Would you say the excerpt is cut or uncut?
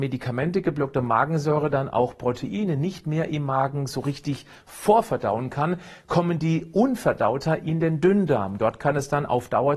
uncut